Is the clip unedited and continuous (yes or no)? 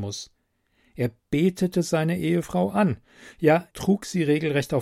no